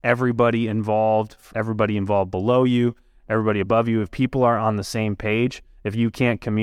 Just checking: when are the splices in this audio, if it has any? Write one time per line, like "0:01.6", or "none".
0:01.5

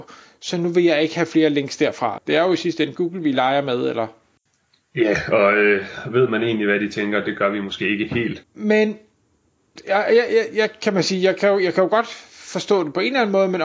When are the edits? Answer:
0:02.2
0:08.4

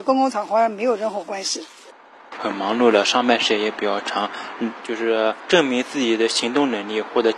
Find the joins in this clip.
0:02.4
0:04.8

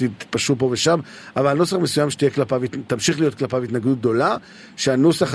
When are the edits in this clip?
none

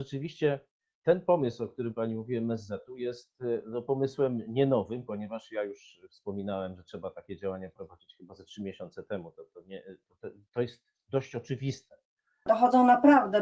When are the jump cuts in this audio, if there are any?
0:12.5

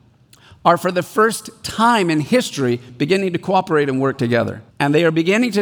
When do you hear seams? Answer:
0:04.7

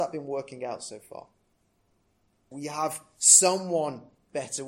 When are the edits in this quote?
0:02.5

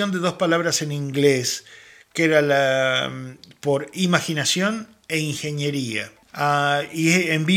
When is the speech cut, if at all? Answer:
none

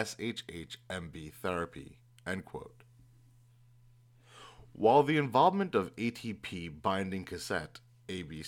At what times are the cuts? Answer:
none

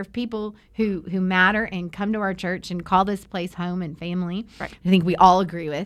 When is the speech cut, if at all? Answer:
0:04.8

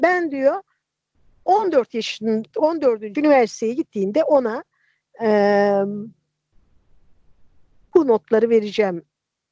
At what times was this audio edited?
0:03.2

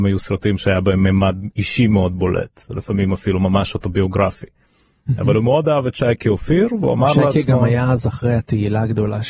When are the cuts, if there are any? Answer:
none

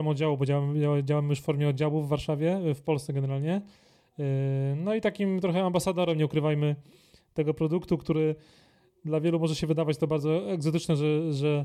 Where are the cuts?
none

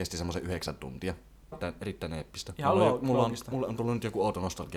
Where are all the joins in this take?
0:01.5

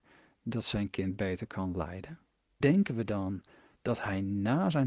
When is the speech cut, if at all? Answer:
0:02.6

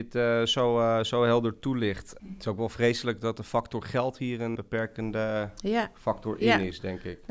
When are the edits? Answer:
0:02.2
0:04.6

